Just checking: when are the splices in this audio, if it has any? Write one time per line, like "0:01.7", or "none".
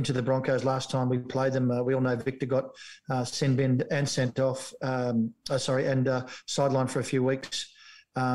none